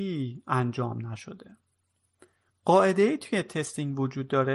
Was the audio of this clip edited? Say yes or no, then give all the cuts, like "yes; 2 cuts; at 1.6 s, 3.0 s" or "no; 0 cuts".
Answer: no; 0 cuts